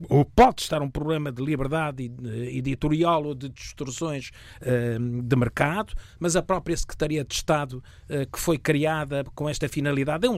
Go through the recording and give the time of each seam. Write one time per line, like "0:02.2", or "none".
none